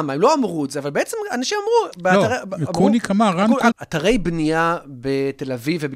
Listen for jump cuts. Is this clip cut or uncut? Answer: cut